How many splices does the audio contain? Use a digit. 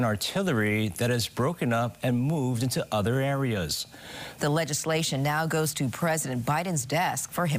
1